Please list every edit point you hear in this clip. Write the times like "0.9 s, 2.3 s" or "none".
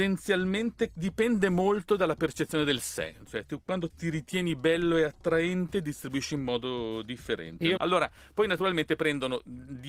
3.9 s, 7.8 s